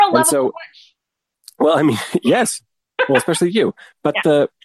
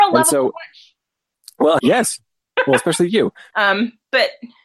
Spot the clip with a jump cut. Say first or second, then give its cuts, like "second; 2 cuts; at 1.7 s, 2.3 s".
second; 2 cuts; at 1.8 s, 3.5 s